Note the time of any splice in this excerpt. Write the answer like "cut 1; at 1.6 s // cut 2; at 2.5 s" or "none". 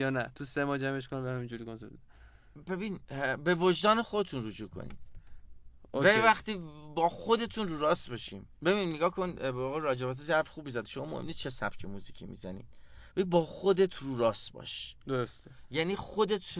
cut 1; at 8.6 s